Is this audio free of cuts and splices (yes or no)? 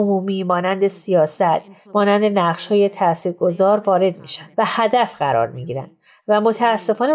no